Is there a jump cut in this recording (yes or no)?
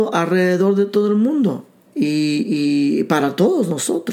yes